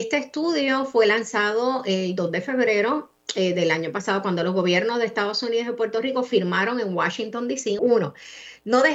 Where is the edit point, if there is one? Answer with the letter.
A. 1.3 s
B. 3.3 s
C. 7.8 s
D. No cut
C